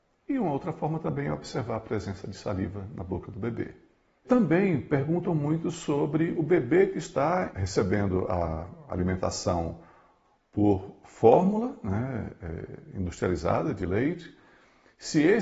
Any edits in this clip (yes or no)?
no